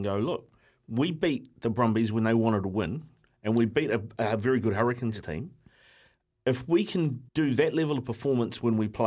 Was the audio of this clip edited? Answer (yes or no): yes